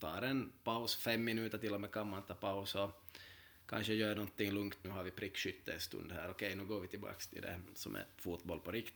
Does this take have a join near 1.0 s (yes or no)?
no